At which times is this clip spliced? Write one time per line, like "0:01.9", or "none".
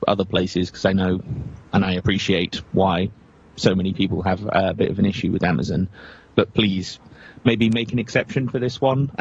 none